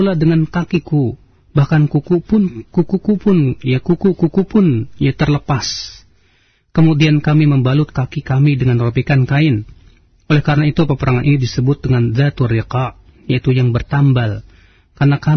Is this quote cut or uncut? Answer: uncut